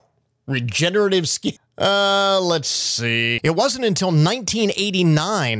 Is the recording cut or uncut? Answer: cut